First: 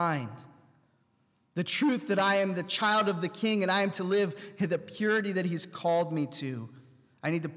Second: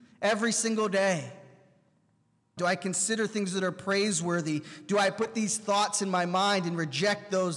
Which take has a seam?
second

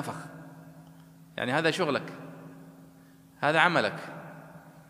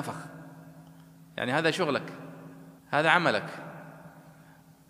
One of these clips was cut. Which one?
second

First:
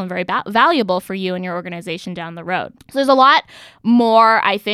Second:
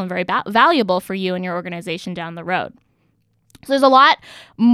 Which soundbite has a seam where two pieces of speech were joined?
first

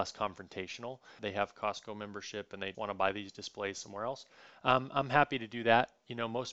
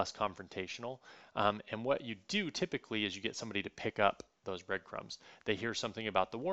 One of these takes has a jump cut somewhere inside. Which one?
first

